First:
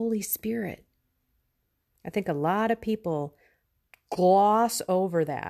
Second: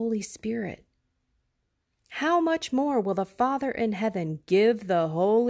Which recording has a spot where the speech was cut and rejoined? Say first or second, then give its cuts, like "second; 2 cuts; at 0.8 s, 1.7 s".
first; 1 cut; at 1.9 s